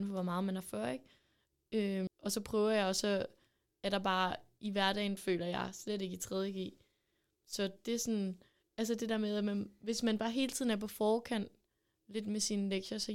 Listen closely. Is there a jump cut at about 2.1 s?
yes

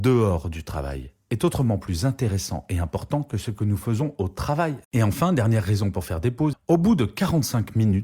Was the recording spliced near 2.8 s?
no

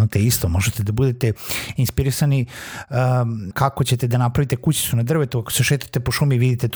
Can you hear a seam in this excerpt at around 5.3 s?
no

